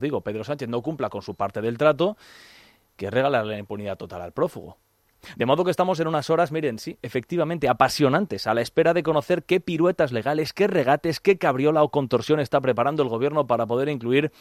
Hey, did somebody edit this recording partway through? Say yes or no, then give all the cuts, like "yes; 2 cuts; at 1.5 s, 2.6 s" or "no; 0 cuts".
no; 0 cuts